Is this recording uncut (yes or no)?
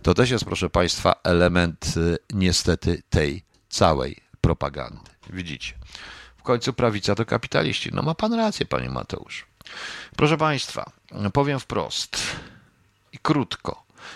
no